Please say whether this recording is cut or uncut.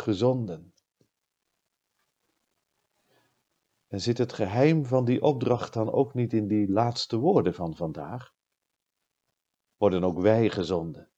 cut